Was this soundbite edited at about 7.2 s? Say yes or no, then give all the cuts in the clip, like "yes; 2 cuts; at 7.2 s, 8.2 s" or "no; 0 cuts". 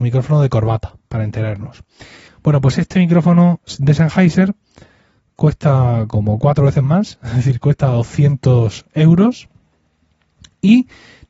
no; 1 cut; at 2.3 s